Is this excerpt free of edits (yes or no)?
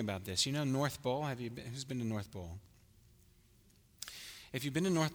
yes